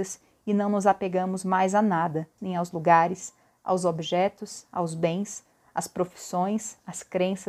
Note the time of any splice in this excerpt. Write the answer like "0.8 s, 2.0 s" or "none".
2.4 s